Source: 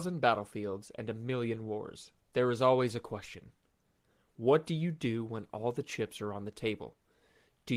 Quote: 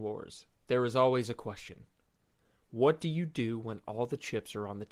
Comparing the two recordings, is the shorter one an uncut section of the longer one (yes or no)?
yes